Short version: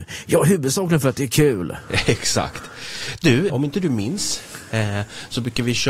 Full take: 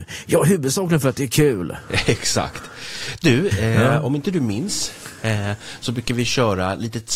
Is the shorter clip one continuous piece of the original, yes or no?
no